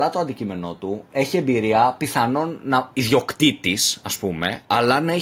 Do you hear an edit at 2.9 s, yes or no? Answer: yes